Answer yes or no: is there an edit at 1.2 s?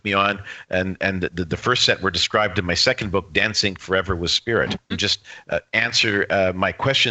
no